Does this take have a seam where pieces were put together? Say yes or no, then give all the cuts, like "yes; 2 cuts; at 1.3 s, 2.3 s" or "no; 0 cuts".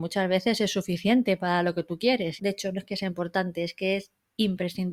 yes; 1 cut; at 2.4 s